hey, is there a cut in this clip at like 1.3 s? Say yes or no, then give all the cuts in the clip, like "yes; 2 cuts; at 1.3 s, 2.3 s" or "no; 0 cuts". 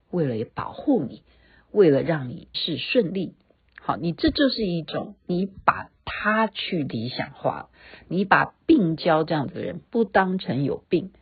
no; 1 cut; at 2.5 s